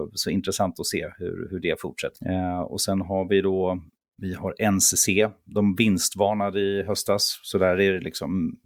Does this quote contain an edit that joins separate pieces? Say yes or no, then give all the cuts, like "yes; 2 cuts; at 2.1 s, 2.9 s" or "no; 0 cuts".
yes; 1 cut; at 2.1 s